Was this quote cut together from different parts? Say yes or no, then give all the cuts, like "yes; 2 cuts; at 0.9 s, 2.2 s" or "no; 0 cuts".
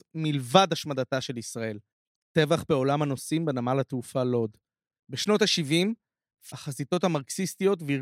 yes; 2 cuts; at 4.9 s, 6.5 s